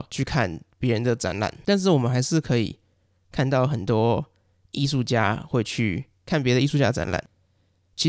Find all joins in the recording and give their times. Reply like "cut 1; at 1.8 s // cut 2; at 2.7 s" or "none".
none